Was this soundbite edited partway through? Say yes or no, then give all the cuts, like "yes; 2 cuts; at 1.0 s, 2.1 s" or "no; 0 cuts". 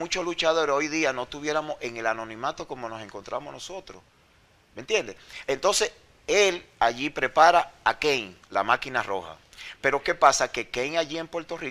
yes; 1 cut; at 8.4 s